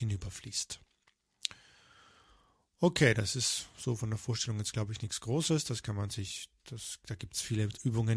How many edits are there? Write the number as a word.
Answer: zero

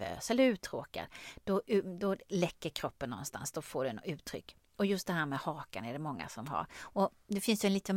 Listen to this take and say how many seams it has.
zero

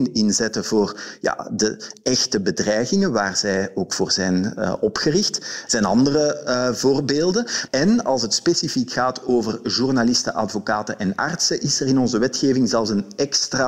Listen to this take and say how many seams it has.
two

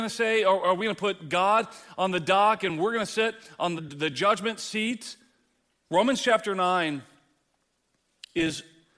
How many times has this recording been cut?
two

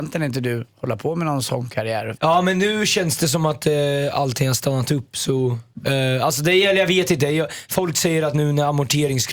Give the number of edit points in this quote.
one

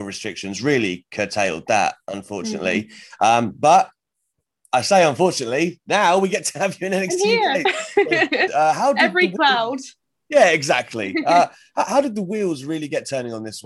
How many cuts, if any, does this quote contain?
one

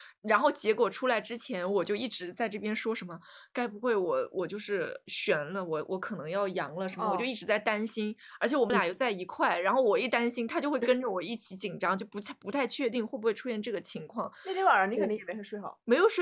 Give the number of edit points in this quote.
zero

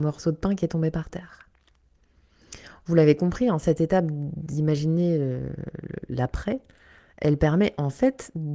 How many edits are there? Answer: zero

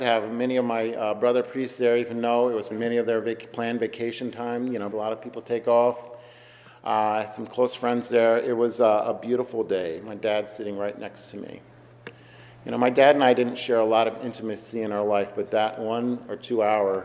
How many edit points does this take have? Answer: two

